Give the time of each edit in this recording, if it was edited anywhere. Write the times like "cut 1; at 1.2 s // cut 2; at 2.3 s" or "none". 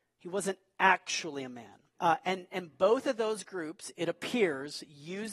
cut 1; at 1.9 s